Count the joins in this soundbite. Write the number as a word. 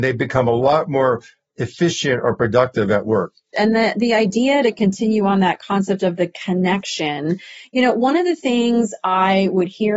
one